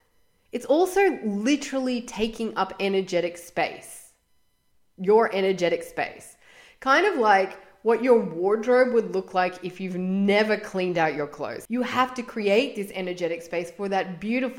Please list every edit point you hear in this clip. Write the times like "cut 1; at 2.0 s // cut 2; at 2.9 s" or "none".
cut 1; at 11.7 s